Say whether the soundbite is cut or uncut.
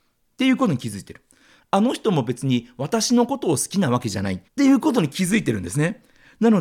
cut